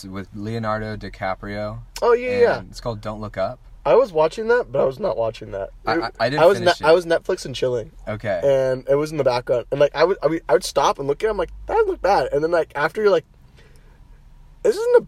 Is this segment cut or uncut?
uncut